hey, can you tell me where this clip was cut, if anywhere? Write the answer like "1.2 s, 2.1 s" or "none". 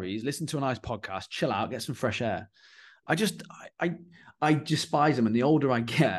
none